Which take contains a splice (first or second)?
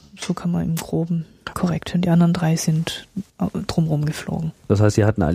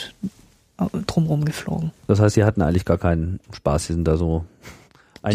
first